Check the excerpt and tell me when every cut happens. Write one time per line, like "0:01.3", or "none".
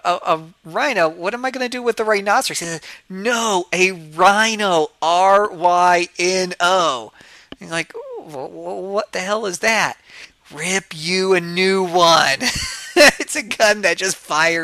none

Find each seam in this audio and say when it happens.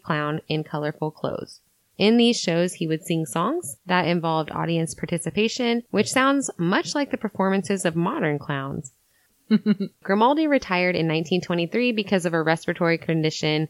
0:09.3

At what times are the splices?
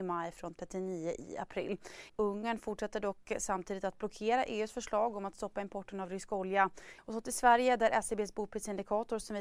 0:02.1
0:07.0

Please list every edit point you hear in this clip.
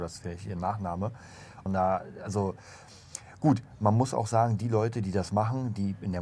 0:01.7

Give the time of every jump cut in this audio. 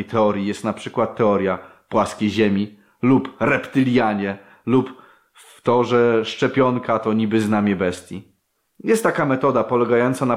0:08.6

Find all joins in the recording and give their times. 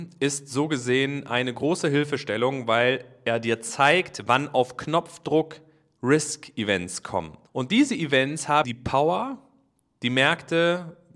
0:07.5
0:08.6

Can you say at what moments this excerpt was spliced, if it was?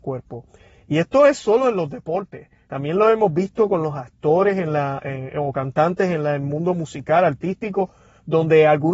none

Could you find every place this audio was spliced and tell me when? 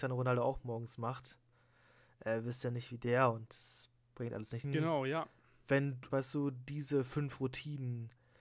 0:04.6
0:06.1

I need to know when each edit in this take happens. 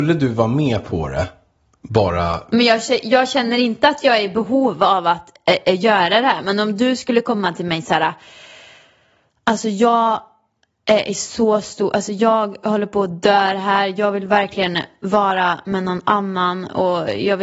none

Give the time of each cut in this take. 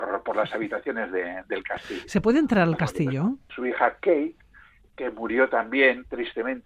0:03.5

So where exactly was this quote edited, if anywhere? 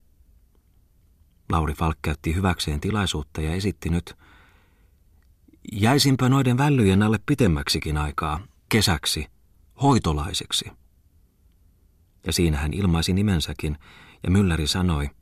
0:08.7

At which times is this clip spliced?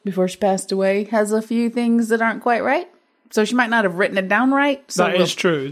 none

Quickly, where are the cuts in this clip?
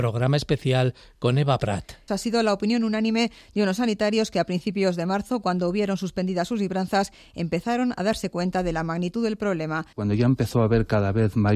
0:02.1
0:09.9

